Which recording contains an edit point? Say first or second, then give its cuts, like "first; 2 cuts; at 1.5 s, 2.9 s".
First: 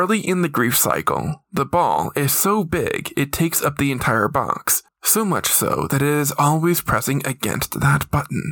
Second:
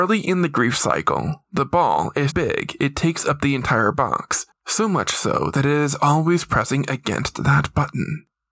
second; 1 cut; at 2.3 s